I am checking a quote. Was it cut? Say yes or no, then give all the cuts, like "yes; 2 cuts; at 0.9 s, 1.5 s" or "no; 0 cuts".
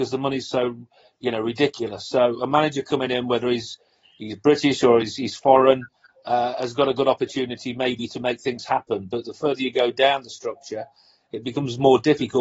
no; 0 cuts